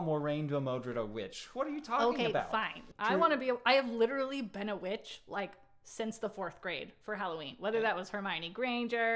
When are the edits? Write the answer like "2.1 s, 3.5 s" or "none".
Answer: 2.9 s